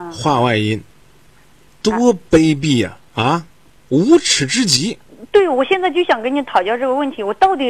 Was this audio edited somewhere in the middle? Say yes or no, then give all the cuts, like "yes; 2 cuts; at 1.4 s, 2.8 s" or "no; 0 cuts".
yes; 1 cut; at 3.1 s